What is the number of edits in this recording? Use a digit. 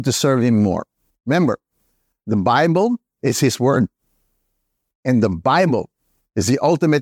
0